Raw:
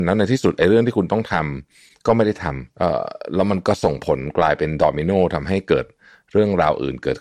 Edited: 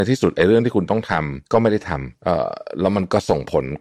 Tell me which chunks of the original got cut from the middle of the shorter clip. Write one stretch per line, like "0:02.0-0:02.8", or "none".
0:01.7-0:02.0